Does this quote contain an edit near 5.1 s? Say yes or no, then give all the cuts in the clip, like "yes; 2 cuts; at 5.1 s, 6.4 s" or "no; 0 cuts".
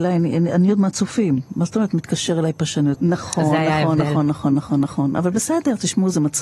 no; 1 cut; at 2.9 s